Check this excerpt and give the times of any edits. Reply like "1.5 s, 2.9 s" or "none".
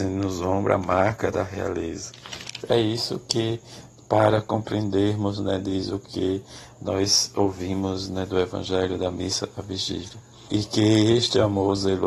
10.5 s